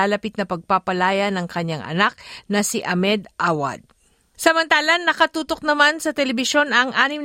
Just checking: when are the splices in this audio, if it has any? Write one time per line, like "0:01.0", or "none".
0:04.3